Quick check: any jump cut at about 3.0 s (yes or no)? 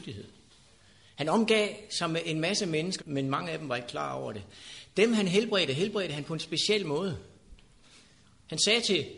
yes